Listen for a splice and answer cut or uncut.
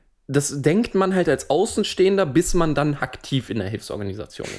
cut